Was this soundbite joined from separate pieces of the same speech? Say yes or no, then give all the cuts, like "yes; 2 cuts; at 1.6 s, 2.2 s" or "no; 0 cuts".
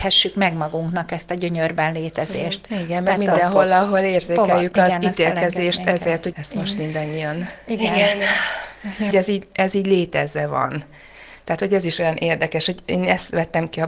yes; 2 cuts; at 6.3 s, 9.1 s